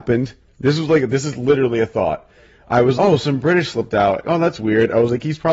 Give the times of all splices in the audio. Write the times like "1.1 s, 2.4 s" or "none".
3.0 s, 4.2 s